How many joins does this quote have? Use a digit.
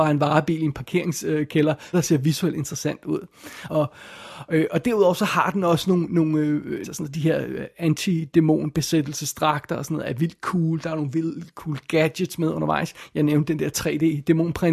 3